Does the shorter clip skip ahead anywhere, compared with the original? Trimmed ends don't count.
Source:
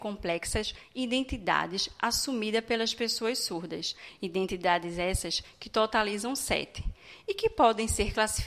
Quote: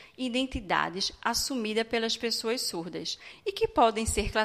yes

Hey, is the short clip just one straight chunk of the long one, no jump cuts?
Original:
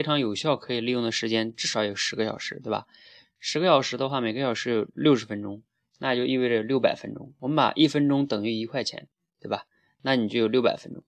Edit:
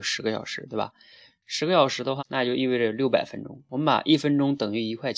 no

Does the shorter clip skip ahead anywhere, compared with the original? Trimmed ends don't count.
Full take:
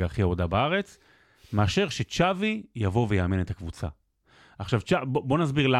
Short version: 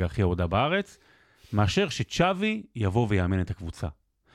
no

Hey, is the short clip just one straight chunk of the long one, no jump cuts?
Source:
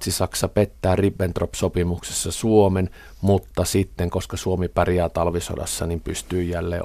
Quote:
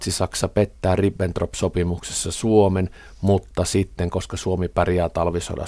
yes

